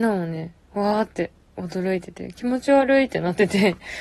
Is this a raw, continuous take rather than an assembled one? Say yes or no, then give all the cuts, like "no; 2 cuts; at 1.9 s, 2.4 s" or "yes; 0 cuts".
yes; 0 cuts